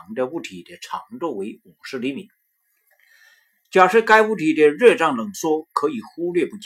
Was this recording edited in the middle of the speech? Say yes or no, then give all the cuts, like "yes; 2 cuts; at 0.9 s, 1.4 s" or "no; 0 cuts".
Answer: no; 0 cuts